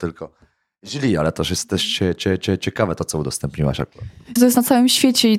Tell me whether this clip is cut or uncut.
uncut